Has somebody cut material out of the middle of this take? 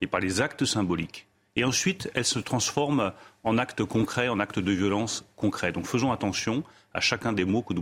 no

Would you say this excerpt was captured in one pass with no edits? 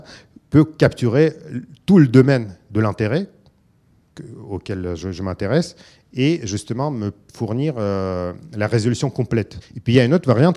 no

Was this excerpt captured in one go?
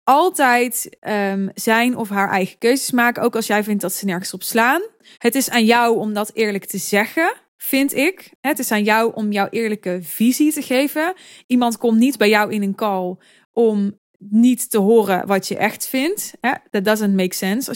no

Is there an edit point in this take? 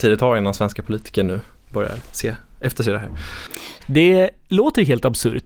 yes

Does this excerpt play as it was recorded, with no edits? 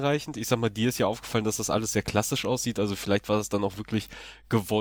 yes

